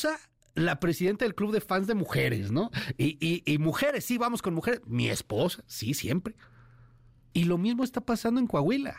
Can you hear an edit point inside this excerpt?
yes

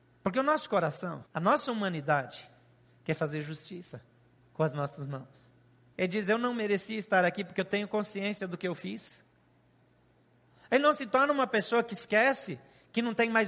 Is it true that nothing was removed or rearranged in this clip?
no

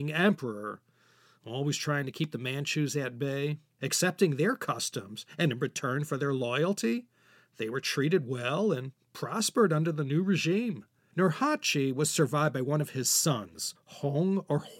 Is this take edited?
yes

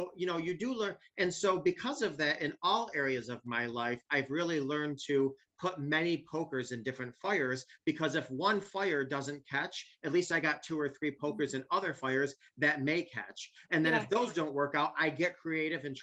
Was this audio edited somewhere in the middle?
no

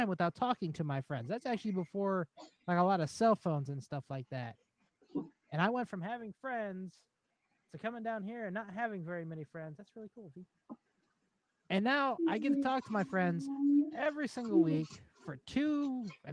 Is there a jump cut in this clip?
no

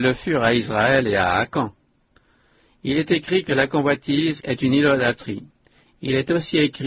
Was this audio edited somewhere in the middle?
yes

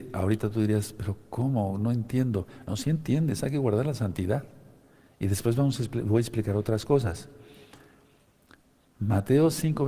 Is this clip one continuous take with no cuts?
yes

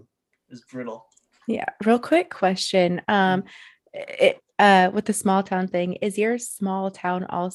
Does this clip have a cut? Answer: no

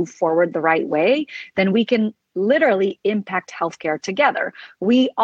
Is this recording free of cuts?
yes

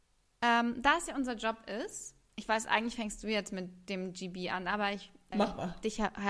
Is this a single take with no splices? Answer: no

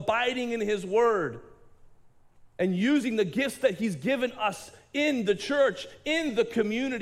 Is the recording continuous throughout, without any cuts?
no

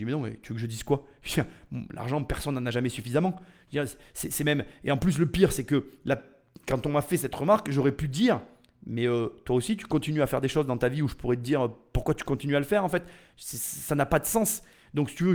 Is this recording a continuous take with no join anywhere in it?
yes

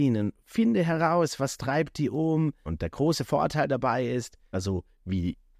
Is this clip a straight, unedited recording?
no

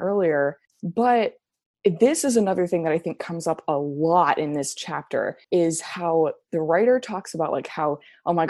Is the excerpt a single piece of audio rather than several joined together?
no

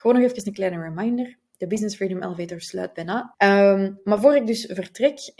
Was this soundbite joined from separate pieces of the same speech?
yes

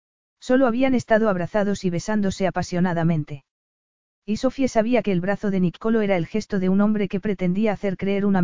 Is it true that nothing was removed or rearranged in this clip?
yes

